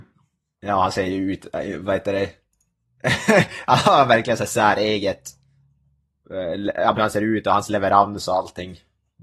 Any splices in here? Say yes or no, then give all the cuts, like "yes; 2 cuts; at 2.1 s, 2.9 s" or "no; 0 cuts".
yes; 1 cut; at 7.0 s